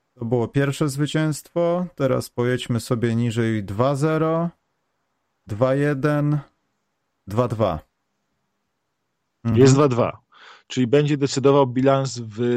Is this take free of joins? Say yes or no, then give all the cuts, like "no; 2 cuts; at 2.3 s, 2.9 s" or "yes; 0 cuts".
yes; 0 cuts